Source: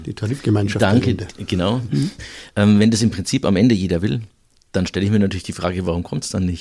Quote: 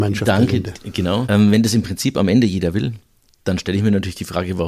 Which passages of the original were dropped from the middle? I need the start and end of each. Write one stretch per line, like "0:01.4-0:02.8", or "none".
0:01.8-0:02.5